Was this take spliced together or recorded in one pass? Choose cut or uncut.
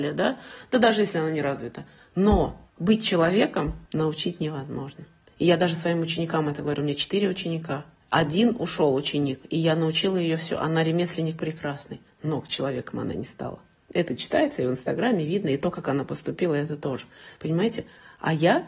cut